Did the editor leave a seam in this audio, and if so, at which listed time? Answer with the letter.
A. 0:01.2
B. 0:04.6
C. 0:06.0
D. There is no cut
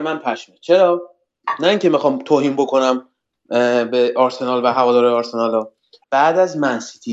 C